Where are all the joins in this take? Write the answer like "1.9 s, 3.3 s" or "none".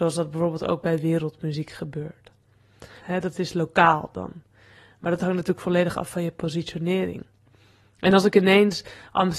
3.0 s